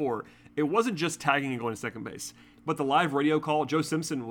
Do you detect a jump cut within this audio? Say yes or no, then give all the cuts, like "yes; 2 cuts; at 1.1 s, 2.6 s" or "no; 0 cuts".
yes; 1 cut; at 2.5 s